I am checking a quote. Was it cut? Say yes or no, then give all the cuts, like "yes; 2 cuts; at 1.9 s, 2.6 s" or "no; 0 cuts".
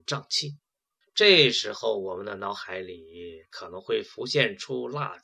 yes; 1 cut; at 1.0 s